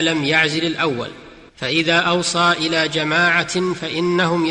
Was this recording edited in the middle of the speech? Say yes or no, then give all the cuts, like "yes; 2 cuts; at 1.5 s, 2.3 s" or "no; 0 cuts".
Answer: yes; 1 cut; at 1.5 s